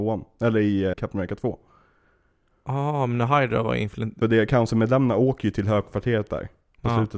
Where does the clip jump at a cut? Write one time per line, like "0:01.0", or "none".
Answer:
0:00.9
0:04.2